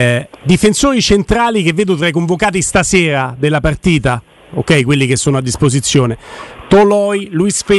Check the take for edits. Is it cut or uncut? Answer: uncut